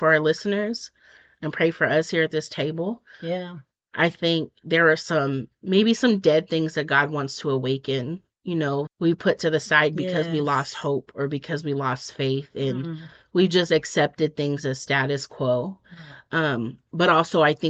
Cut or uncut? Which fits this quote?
cut